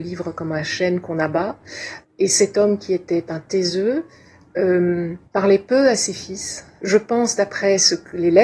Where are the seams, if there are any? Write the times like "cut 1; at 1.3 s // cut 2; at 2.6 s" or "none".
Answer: cut 1; at 2.0 s // cut 2; at 5.3 s // cut 3; at 6.8 s